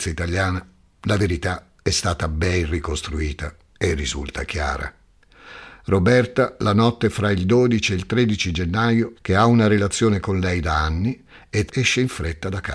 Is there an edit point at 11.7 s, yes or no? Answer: yes